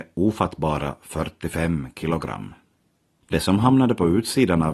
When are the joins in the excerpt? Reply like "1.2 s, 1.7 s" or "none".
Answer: 3.2 s